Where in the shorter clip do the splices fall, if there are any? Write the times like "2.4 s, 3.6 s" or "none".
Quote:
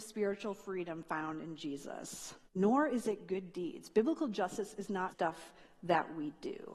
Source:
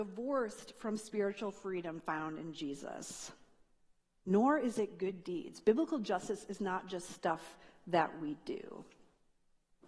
2.5 s, 5.1 s

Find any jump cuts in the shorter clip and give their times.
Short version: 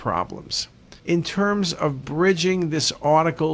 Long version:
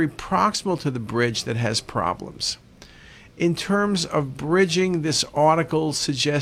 1.0 s

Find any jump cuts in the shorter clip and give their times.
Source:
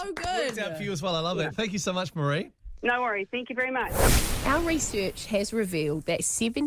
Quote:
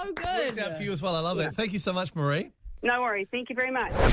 none

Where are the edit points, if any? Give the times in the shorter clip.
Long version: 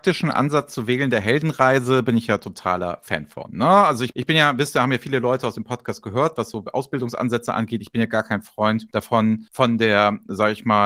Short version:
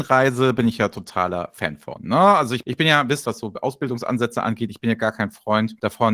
3.2 s

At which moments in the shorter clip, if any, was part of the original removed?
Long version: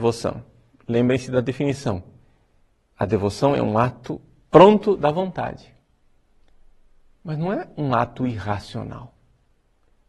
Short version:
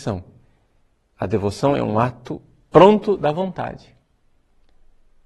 none

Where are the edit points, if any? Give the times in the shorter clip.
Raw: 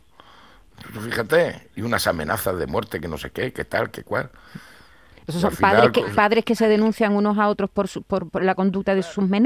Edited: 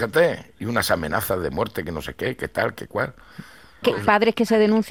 3.8 s

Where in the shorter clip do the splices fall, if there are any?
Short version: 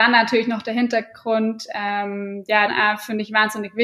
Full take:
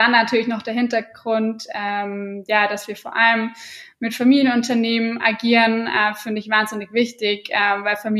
2.7 s

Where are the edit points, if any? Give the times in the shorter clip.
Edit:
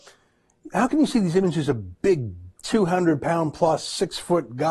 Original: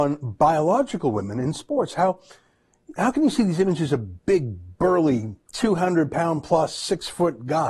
2.5 s

